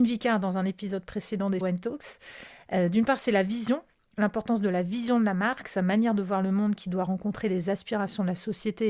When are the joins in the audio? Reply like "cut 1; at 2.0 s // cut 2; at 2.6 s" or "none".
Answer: cut 1; at 1.6 s

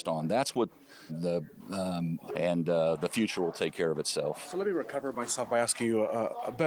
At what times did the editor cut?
cut 1; at 1.1 s // cut 2; at 2.3 s

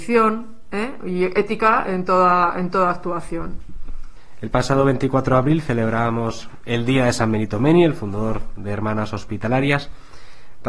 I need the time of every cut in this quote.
none

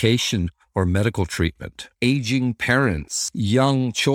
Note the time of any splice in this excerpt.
cut 1; at 1.9 s

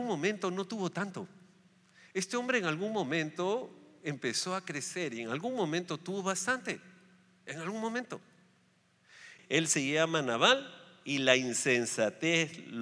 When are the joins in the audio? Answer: cut 1; at 9.4 s

